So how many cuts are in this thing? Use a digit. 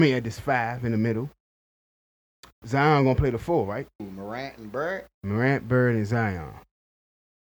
2